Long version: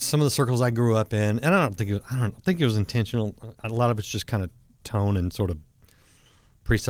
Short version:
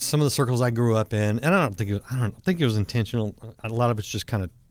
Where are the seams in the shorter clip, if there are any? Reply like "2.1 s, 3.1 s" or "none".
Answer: none